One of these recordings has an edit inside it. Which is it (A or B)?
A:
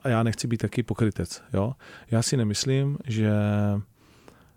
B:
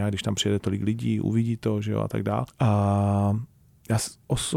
B